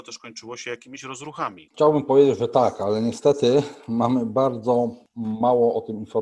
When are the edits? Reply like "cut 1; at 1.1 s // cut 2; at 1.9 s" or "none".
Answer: cut 1; at 1.7 s

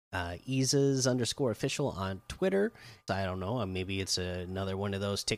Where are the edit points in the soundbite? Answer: cut 1; at 3.1 s

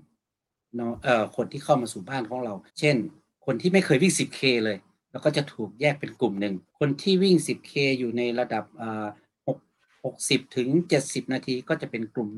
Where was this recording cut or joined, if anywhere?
cut 1; at 2.7 s // cut 2; at 6.7 s

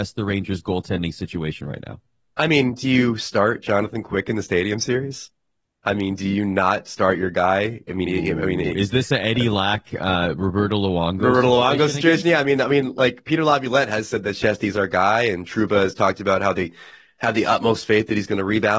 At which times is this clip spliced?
none

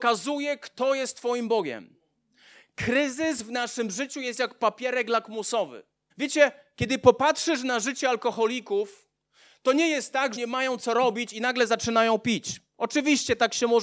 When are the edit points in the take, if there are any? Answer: cut 1; at 6.1 s // cut 2; at 10.4 s

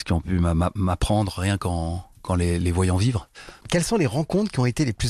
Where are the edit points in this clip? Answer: cut 1; at 3.6 s

